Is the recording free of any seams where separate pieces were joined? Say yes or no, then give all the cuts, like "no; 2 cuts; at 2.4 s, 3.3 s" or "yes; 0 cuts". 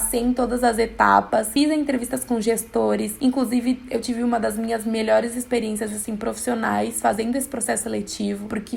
yes; 0 cuts